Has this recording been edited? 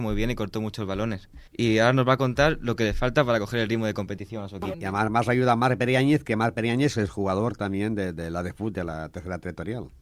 yes; 2 cuts; at 1.5 s, 4.7 s

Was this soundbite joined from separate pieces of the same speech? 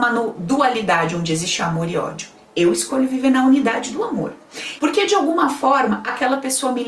yes; 1 cut; at 4.8 s

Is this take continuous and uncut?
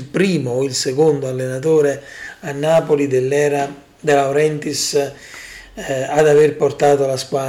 yes; 0 cuts

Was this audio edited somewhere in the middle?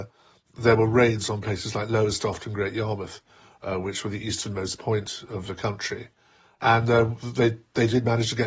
no; 0 cuts

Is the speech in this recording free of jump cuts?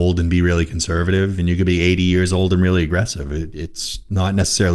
yes; 0 cuts

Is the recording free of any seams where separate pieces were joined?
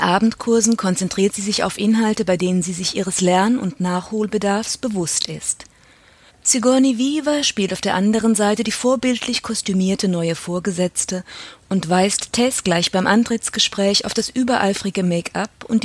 no; 1 cut; at 6.3 s

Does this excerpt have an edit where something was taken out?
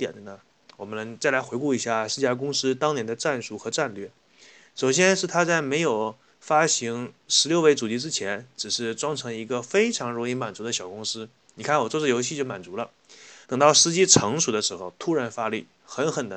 yes; 1 cut; at 13.4 s

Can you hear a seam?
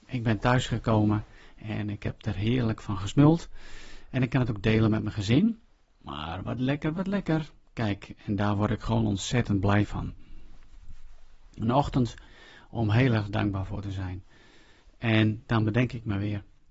yes; 1 cut; at 6.9 s

